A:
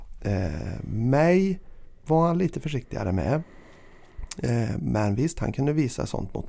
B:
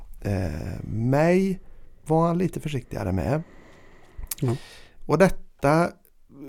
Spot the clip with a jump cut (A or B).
B